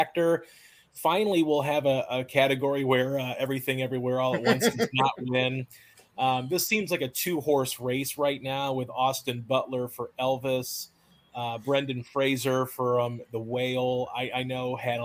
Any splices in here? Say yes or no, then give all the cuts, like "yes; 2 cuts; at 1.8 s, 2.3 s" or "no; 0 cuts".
no; 0 cuts